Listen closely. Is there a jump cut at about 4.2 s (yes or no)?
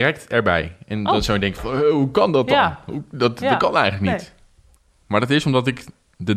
no